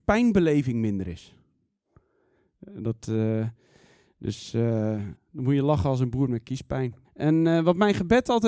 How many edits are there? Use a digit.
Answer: 2